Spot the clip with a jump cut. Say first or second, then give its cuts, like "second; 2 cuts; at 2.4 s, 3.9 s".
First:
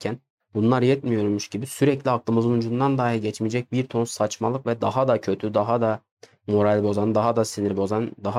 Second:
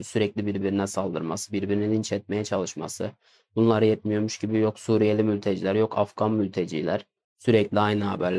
second; 1 cut; at 7.2 s